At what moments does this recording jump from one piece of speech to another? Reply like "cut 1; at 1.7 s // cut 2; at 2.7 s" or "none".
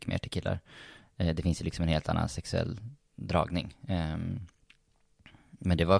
none